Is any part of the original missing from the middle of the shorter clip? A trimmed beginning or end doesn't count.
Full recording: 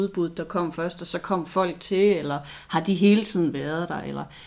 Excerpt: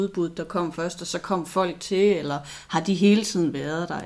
no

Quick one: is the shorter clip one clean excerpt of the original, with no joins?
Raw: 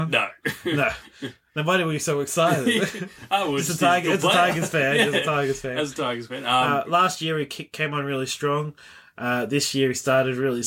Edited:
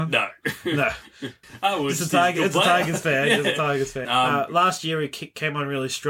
no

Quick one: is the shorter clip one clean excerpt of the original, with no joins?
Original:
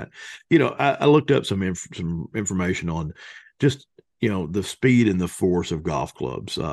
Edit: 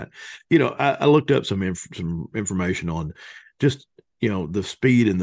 yes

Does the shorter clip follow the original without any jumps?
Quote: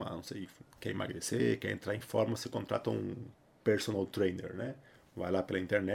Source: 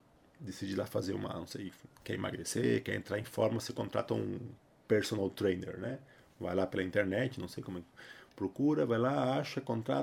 yes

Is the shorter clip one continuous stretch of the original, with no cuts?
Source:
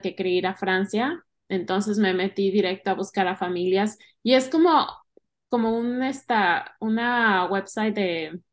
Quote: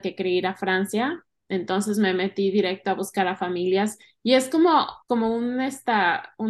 no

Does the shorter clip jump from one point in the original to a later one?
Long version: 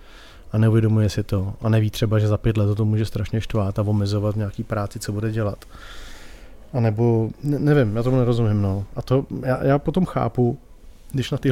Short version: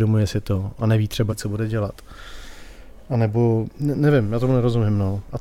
yes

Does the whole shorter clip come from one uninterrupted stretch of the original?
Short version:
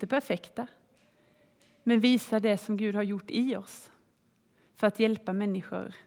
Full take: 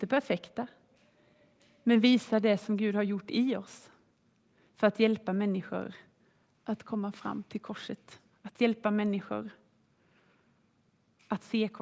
yes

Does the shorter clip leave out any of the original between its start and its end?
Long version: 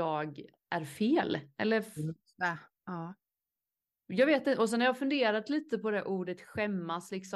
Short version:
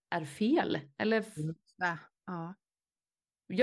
no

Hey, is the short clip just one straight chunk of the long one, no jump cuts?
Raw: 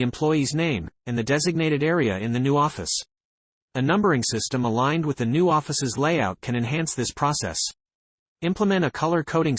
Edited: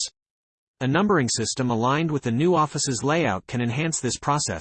yes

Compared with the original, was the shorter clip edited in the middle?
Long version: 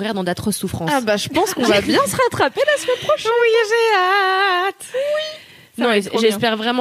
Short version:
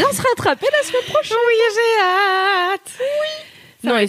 no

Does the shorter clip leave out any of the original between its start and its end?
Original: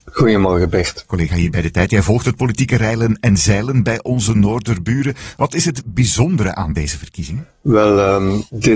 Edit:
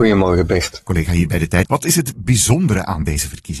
yes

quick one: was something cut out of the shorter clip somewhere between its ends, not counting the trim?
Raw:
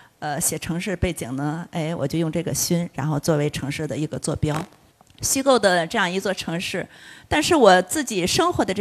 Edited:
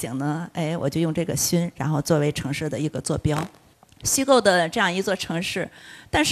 no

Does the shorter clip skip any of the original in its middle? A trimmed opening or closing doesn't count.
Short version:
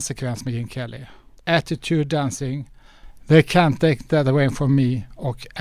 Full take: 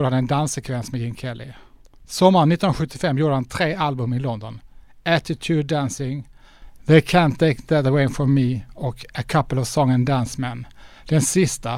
yes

